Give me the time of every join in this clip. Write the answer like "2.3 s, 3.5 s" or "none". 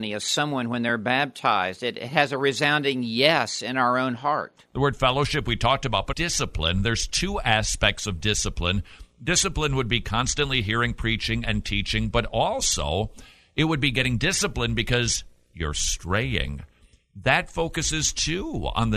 6.1 s